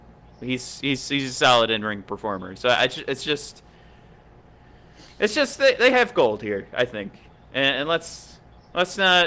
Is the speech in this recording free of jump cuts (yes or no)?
yes